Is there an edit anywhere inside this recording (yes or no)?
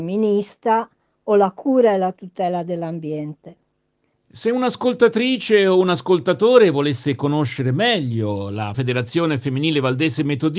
yes